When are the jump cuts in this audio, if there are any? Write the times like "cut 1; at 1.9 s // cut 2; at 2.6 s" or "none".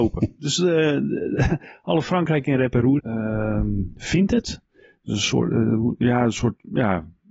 cut 1; at 3.0 s